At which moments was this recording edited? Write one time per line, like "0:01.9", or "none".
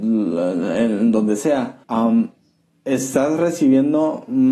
0:01.8